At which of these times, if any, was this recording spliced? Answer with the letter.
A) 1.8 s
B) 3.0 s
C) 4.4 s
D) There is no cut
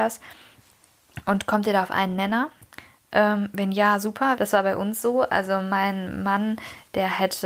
C